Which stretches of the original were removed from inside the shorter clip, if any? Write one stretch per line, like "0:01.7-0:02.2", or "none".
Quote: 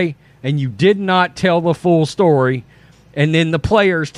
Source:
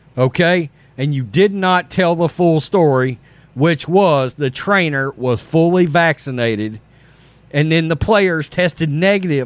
0:03.5-0:07.3